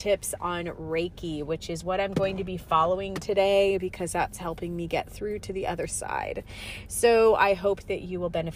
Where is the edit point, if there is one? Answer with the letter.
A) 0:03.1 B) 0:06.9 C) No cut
C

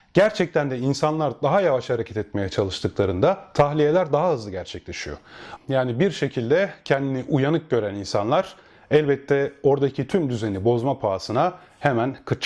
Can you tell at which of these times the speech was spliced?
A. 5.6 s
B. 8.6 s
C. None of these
A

